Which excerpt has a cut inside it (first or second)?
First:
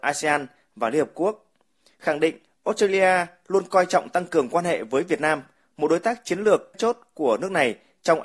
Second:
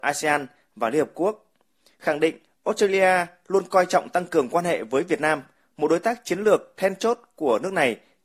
first